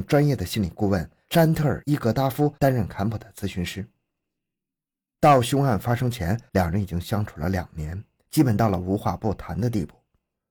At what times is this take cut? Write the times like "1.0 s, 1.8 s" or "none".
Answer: none